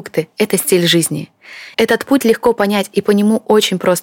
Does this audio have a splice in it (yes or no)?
yes